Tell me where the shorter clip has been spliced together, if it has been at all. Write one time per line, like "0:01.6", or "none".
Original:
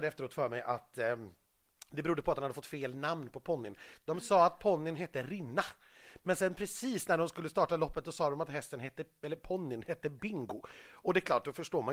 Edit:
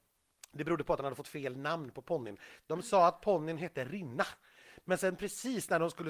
none